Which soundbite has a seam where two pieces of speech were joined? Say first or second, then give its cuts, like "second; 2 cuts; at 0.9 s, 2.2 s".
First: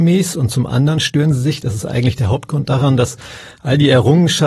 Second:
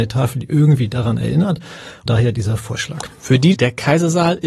second; 2 cuts; at 2.1 s, 3.5 s